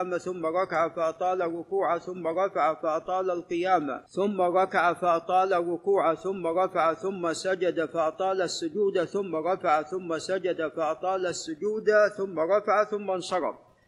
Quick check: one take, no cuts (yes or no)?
no